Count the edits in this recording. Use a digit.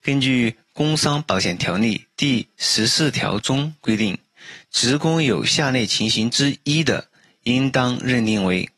0